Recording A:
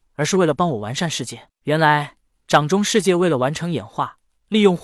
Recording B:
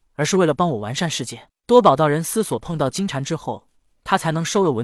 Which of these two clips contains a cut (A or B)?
A